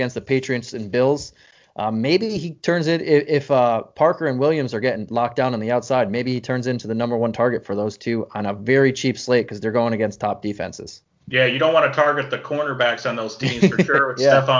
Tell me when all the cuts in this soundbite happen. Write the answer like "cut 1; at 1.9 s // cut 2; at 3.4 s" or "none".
none